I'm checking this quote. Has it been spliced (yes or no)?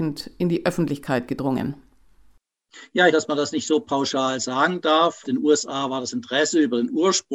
yes